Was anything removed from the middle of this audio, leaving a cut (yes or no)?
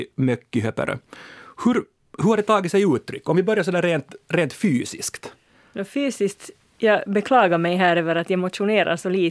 no